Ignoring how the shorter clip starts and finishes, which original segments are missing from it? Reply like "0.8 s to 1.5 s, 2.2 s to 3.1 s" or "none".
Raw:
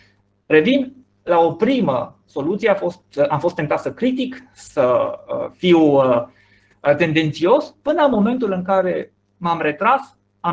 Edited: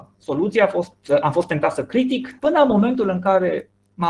4.4 s to 7.8 s